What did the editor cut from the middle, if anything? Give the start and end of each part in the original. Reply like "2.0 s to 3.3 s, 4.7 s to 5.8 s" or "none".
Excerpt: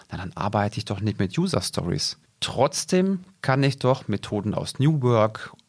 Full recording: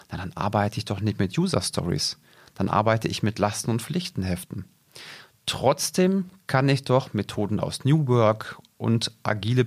2.2 s to 5.3 s